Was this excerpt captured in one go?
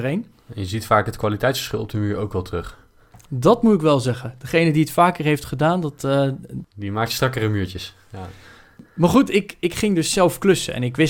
yes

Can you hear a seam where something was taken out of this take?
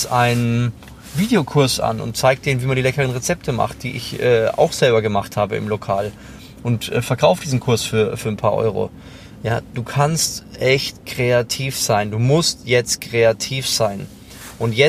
no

